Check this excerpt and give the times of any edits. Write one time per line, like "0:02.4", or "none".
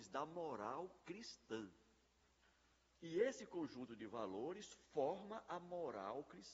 0:02.9